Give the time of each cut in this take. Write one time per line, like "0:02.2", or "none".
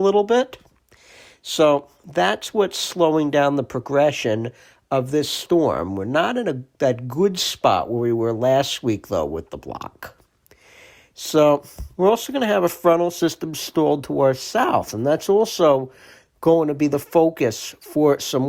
none